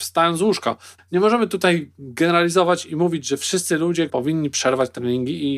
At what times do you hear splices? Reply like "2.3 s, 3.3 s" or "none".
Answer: 1.0 s, 4.1 s